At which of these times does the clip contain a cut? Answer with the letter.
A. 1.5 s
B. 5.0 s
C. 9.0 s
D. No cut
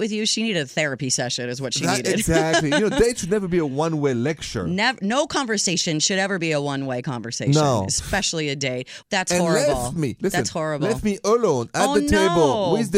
C